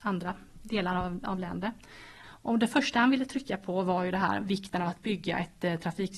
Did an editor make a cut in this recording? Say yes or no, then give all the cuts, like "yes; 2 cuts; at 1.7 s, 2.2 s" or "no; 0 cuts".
yes; 1 cut; at 2.2 s